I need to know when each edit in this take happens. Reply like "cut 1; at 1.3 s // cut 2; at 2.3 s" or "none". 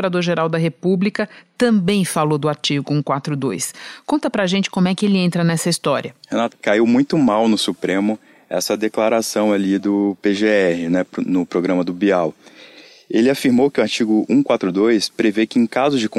cut 1; at 6.5 s

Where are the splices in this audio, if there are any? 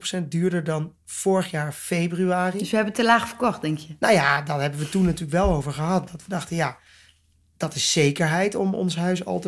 none

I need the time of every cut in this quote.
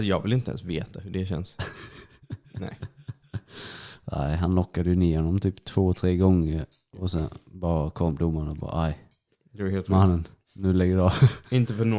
none

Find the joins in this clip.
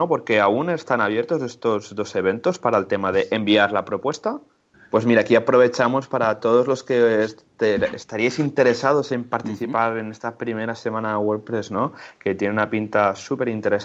cut 1; at 4.7 s

